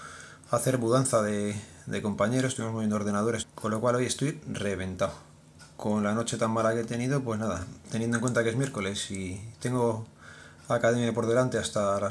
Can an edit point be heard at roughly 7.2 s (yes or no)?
no